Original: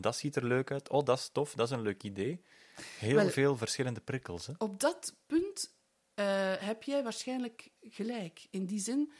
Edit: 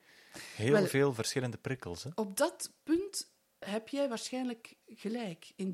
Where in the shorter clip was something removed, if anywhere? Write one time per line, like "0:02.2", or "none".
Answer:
0:03.6